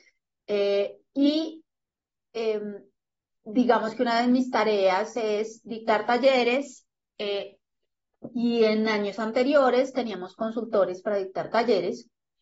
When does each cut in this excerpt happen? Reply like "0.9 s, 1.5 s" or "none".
none